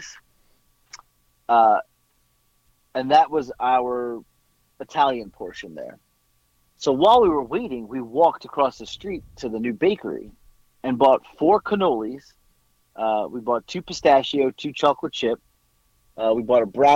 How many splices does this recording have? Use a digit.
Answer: 0